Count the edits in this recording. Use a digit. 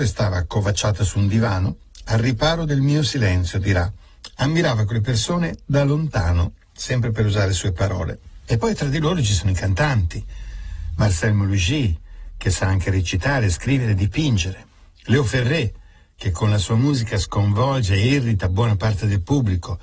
0